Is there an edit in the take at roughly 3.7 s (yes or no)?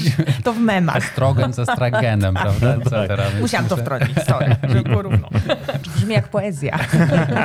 no